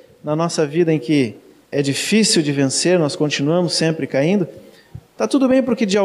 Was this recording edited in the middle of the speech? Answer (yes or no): yes